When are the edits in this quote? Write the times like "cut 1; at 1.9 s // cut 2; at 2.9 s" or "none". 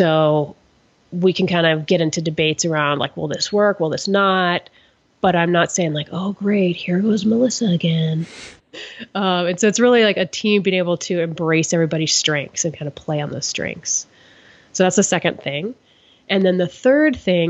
cut 1; at 8.6 s